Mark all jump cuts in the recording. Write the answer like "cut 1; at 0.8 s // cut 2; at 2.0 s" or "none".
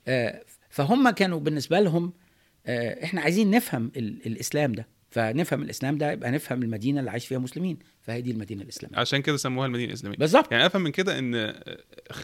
cut 1; at 3.9 s // cut 2; at 5.0 s